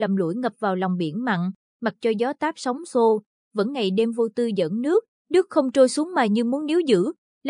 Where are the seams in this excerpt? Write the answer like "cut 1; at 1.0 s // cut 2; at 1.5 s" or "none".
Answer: cut 1; at 5.1 s